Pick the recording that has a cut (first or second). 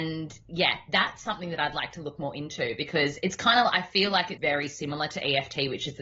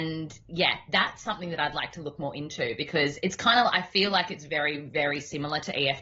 first